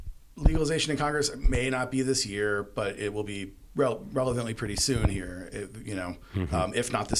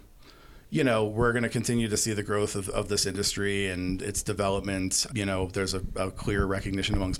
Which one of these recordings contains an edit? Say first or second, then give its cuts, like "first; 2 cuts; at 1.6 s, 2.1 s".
second; 1 cut; at 5.1 s